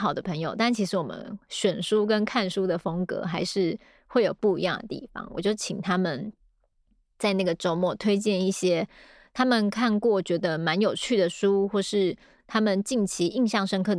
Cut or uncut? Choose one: uncut